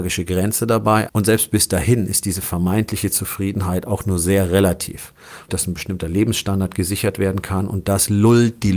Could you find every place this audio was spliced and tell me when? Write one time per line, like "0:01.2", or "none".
0:01.1
0:05.5